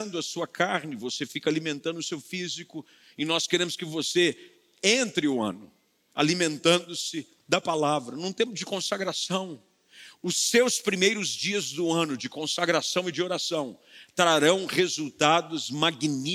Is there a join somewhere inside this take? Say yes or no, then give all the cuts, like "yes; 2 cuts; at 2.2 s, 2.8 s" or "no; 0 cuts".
no; 0 cuts